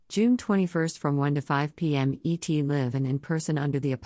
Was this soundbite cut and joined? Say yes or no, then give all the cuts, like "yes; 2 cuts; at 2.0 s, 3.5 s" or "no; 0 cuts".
no; 0 cuts